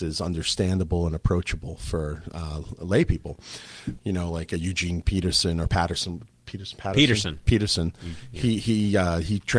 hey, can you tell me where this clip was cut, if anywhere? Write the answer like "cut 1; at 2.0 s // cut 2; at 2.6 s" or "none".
cut 1; at 4.0 s